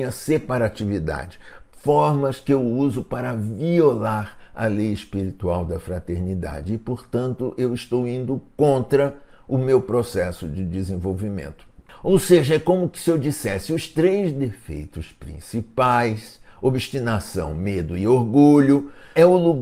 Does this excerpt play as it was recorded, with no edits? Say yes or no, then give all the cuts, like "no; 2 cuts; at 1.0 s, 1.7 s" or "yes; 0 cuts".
yes; 0 cuts